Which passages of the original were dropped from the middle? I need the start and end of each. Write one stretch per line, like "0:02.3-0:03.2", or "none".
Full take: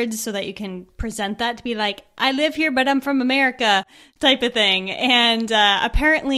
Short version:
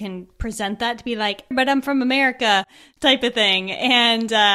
0:02.1-0:02.7